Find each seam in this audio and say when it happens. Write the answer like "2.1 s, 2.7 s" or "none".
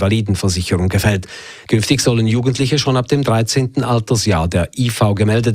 none